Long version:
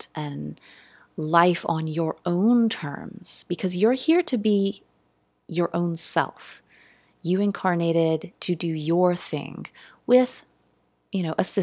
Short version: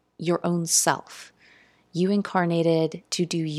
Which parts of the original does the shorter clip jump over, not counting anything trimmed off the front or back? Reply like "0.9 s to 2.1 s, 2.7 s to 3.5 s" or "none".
none

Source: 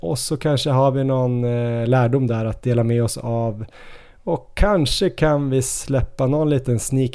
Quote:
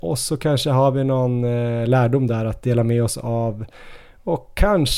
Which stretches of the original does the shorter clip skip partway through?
none

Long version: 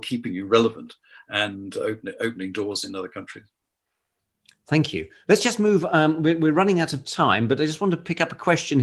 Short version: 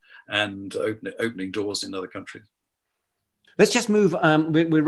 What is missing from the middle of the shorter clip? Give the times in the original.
4.5 s to 5.2 s

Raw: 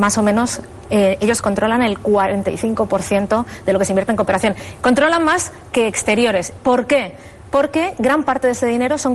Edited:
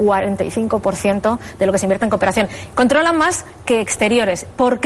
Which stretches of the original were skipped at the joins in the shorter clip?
none

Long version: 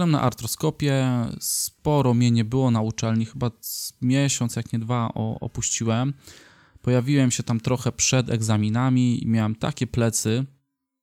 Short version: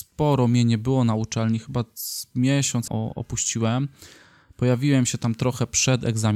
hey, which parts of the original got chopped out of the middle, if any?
4.5 s to 5.1 s

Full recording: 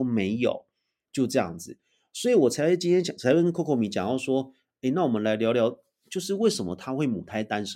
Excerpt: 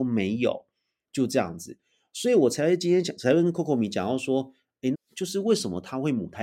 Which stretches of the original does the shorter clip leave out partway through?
4.9 s to 5.9 s

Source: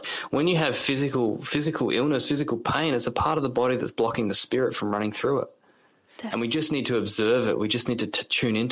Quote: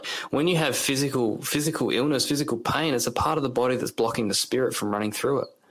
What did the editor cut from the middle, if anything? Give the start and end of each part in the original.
none

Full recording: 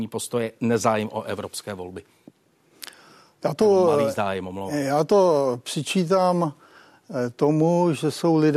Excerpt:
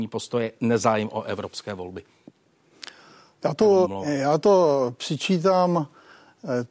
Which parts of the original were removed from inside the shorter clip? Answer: 3.8 s to 4.5 s

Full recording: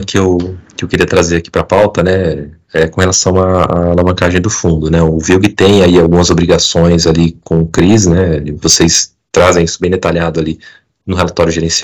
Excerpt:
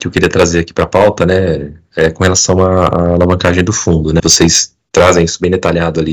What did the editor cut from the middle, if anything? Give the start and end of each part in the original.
5.0 s to 8.6 s

